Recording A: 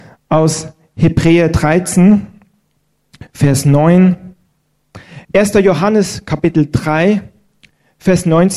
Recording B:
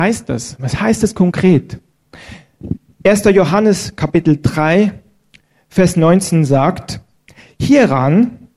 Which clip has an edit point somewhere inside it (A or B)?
A